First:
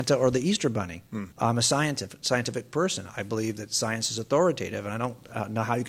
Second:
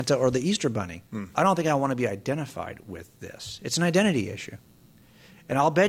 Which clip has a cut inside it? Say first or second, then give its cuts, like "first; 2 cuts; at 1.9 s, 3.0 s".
first; 1 cut; at 1.3 s